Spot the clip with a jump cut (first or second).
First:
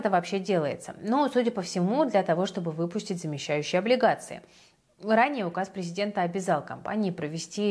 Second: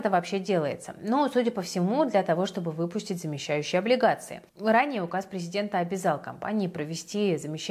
second